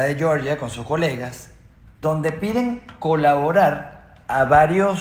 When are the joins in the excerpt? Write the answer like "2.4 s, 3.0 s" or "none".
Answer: none